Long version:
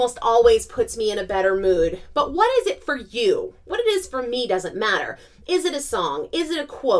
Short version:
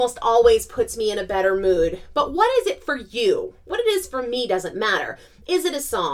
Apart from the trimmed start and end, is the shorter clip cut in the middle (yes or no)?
no